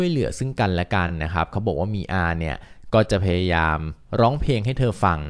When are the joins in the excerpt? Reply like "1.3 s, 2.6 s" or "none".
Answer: none